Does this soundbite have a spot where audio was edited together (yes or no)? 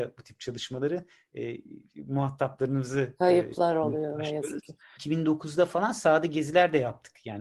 yes